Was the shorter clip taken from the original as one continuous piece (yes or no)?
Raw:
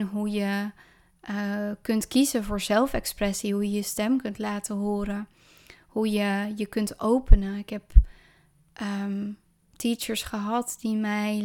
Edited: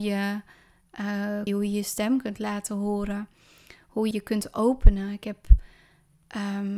no